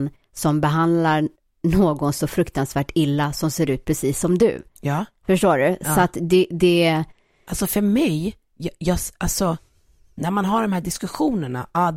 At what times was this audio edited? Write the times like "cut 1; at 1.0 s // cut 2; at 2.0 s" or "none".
none